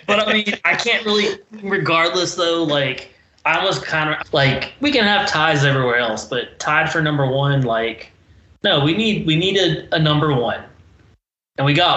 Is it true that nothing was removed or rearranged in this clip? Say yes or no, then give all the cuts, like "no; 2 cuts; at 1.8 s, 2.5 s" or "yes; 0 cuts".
no; 1 cut; at 4.2 s